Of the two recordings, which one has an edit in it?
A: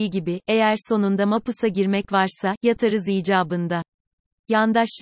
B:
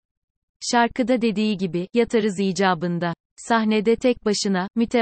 B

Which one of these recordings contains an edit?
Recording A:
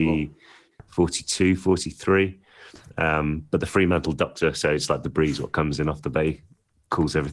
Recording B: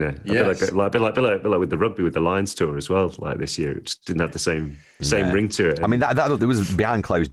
B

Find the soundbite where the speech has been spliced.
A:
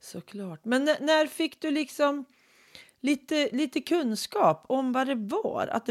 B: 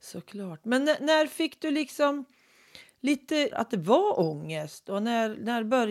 B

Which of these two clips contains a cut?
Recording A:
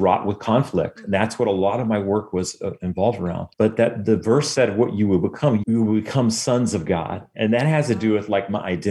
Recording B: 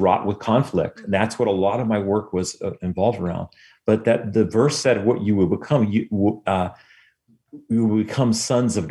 A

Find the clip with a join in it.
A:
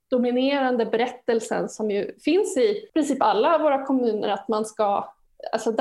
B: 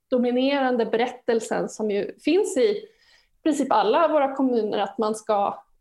A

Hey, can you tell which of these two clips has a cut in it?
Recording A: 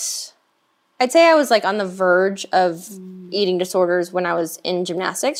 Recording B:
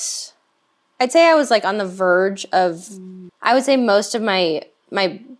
B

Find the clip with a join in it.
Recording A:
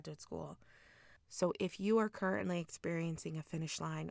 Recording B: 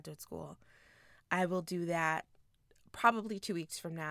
A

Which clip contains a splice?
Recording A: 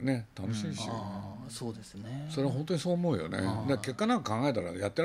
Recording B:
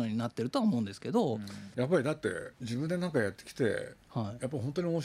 B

